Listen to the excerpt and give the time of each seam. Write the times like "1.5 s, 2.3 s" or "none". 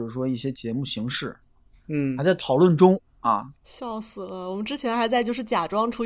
1.7 s, 3.5 s